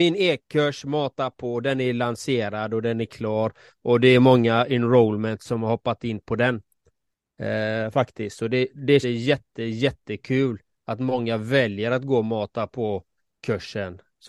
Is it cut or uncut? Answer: cut